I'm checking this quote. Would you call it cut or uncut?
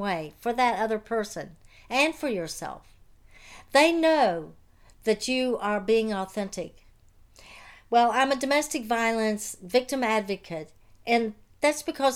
uncut